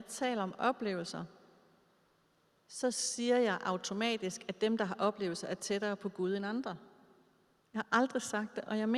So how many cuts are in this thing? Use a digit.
1